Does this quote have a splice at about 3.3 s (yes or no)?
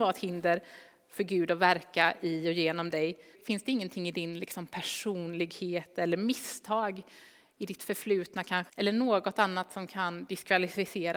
yes